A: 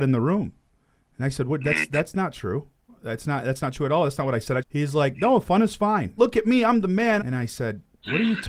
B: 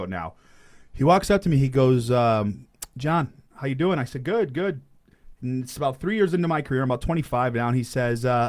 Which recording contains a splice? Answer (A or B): A